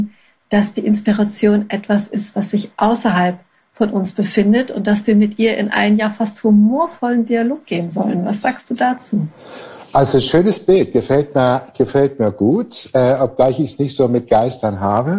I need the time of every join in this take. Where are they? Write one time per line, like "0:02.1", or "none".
none